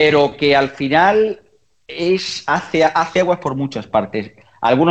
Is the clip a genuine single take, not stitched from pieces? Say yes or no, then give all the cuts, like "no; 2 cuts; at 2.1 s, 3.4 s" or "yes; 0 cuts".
yes; 0 cuts